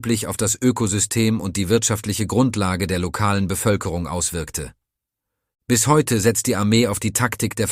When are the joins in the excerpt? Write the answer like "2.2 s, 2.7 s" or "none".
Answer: 5.5 s

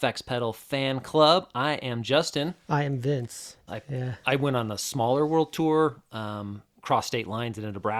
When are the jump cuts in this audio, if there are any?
3.7 s

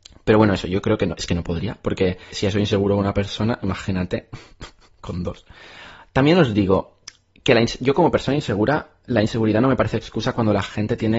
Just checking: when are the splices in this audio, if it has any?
2.3 s

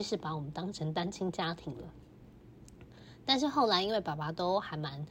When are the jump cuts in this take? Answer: none

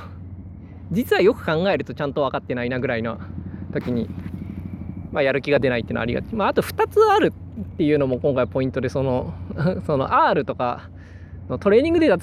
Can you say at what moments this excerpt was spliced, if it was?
none

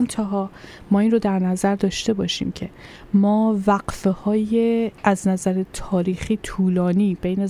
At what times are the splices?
4.9 s

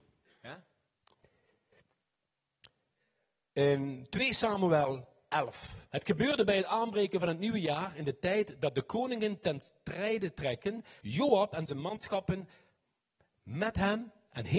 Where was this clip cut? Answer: 5.9 s, 11.0 s

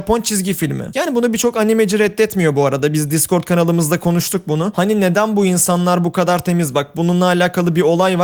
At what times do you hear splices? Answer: 4.7 s

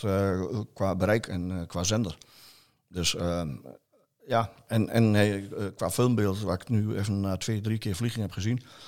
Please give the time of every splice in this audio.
none

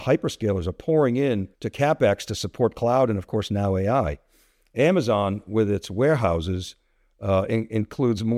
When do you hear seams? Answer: 1.5 s

